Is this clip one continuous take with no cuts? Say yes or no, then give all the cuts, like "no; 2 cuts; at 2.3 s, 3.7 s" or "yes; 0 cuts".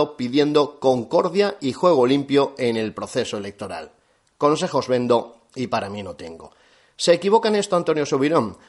yes; 0 cuts